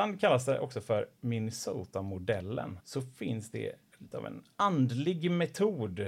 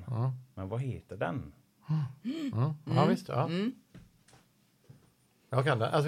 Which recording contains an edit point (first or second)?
first